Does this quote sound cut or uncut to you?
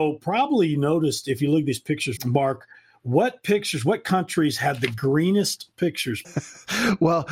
cut